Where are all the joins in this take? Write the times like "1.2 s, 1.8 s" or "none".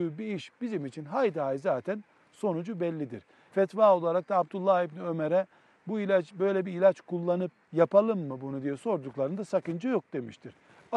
3.5 s